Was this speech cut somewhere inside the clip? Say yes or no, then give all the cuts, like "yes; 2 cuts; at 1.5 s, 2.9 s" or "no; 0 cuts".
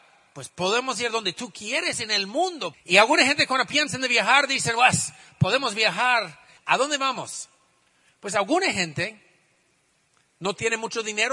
yes; 2 cuts; at 2.7 s, 6.6 s